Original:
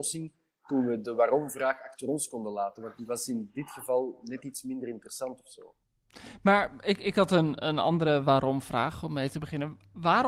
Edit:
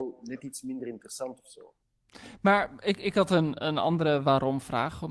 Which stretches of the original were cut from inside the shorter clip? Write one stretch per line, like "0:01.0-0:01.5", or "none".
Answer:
none